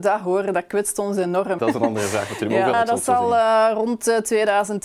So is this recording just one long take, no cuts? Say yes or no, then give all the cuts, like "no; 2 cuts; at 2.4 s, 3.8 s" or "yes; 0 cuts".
no; 2 cuts; at 1.6 s, 2.7 s